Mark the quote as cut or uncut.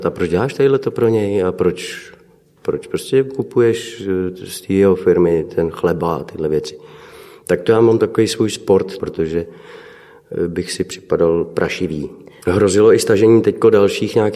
cut